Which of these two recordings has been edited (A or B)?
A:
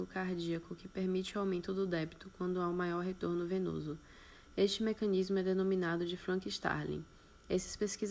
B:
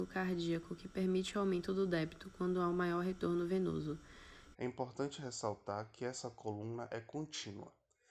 B